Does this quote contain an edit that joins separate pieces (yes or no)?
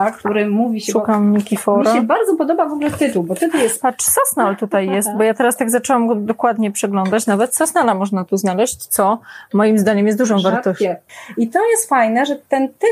no